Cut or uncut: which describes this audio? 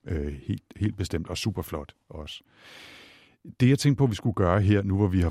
uncut